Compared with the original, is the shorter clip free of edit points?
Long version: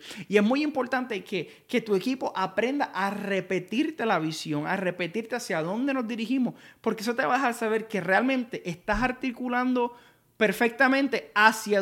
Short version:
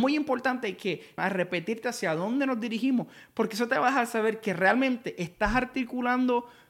no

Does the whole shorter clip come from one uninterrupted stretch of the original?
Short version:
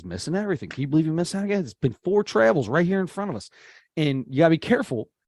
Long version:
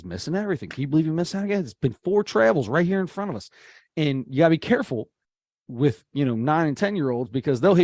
yes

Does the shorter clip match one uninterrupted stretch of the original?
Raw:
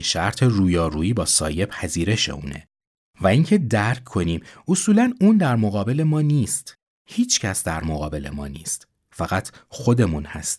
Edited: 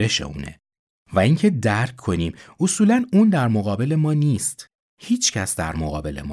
yes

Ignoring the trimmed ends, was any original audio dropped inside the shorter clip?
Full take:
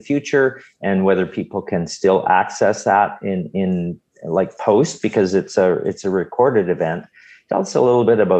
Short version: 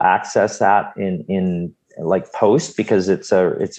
no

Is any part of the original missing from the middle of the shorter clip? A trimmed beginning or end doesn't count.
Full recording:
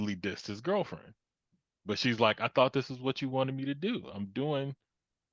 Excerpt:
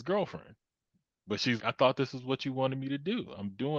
yes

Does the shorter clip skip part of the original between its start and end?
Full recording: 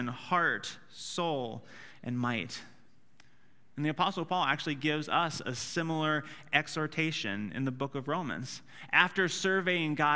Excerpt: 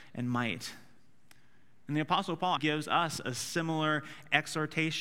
yes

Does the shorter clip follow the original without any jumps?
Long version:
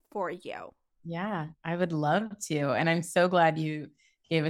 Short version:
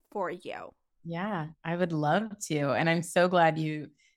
yes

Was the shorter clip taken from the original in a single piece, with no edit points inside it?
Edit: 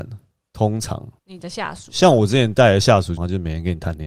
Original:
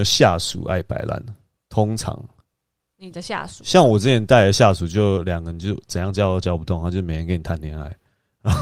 no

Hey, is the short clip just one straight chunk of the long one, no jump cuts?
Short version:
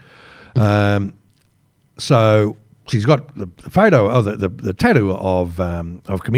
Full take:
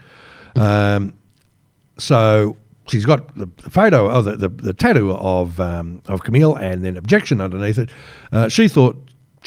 yes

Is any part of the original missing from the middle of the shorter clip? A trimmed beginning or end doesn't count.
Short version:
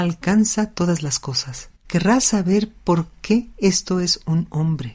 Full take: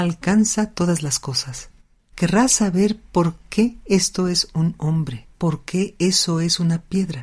yes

